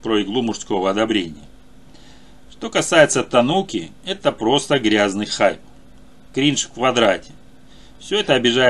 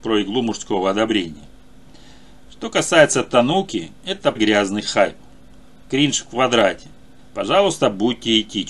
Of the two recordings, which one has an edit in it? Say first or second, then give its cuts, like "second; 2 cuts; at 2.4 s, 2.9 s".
second; 2 cuts; at 4.4 s, 7.2 s